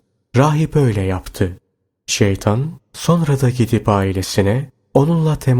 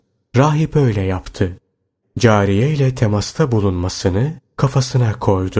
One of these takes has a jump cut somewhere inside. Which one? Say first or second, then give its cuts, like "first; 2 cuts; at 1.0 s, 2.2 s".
second; 1 cut; at 2.0 s